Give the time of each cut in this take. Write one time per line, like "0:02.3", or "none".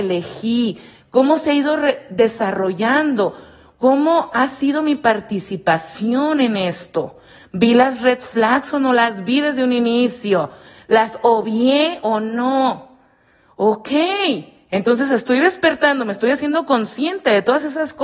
none

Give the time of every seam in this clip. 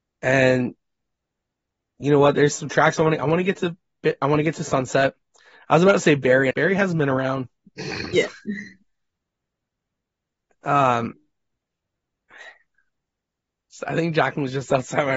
0:06.5
0:08.1

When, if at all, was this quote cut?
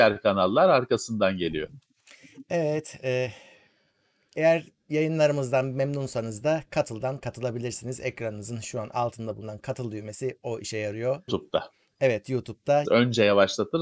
0:11.3
0:12.8

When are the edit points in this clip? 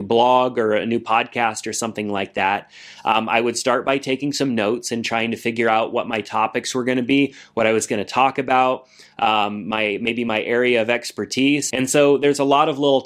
0:11.7

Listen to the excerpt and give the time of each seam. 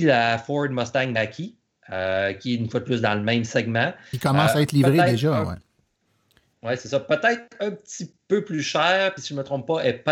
none

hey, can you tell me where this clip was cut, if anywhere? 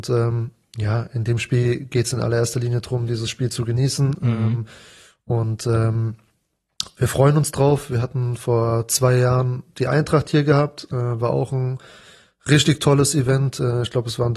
none

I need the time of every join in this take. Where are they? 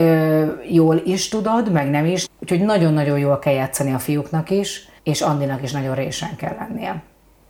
0:02.3
0:05.0

